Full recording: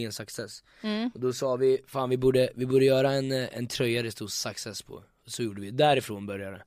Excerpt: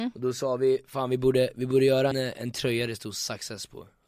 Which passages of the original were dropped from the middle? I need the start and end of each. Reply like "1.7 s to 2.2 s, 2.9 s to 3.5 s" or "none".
3.1 s to 3.3 s

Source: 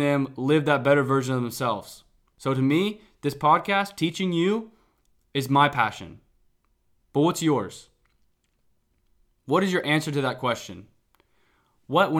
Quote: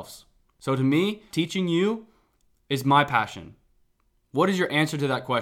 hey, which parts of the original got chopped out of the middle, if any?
3.1 s to 4.0 s, 6.8 s to 9.3 s

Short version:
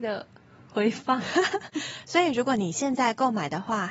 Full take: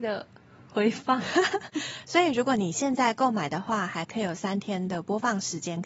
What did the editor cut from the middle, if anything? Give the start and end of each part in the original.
none

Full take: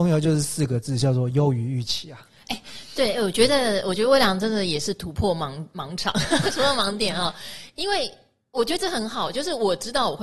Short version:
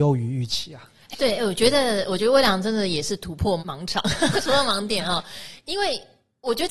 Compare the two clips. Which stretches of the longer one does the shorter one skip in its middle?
2.5 s to 2.9 s, 5.4 s to 5.7 s

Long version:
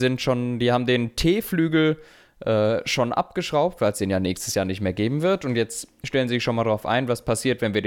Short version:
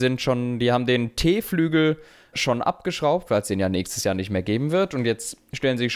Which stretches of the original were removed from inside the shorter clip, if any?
2.3 s to 2.8 s

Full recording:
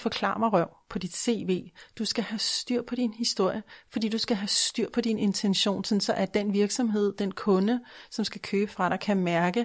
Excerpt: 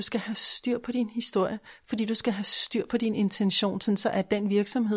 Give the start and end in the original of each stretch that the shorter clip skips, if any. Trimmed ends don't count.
none

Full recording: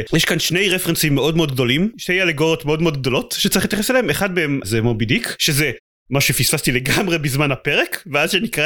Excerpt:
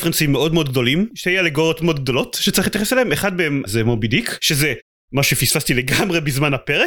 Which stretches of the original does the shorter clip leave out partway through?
2.6 s to 2.8 s

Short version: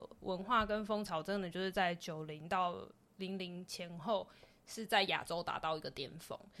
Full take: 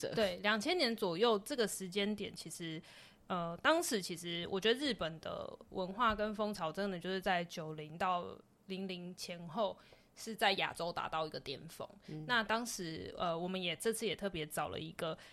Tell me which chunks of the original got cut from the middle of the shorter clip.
none

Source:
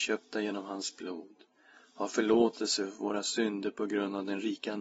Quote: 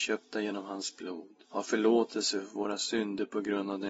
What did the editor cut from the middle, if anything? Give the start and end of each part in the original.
1.4 s to 1.9 s

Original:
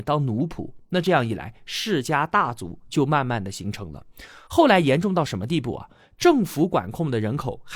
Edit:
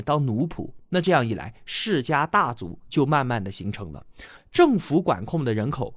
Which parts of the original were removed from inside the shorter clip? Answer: 4.4 s to 6.0 s

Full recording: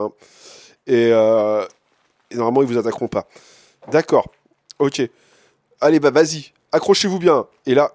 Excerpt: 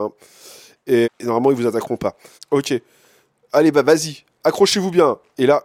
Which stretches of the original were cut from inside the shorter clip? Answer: 1.0 s to 2.2 s, 3.5 s to 4.6 s

